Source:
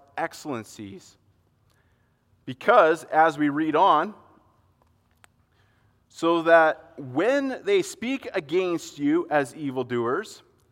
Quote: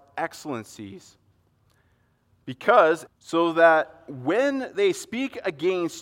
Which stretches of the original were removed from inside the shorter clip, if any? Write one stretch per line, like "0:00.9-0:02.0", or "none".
0:03.1-0:06.0